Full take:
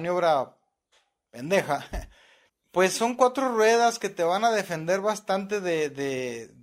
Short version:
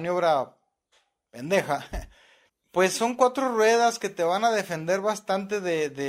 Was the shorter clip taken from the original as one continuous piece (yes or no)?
yes